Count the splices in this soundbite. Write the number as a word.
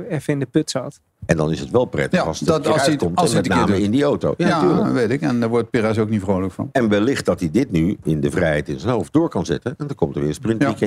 one